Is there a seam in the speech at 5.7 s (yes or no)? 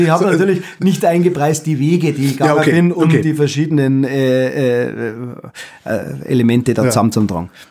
no